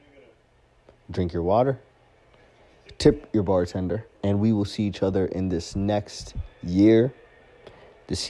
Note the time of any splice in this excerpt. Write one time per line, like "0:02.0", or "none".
0:04.1